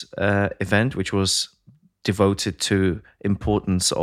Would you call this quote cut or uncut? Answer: uncut